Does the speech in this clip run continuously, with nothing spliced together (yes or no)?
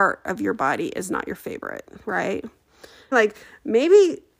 no